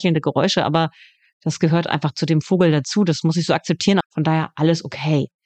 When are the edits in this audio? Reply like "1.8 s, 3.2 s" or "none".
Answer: 4.0 s